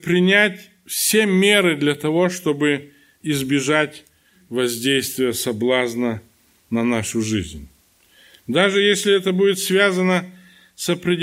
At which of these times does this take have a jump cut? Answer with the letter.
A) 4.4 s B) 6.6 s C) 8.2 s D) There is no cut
D